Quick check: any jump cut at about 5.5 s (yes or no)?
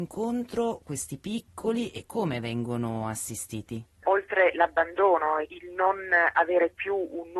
yes